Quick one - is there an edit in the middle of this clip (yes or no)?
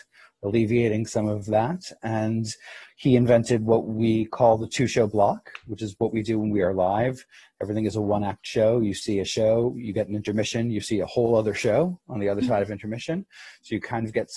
no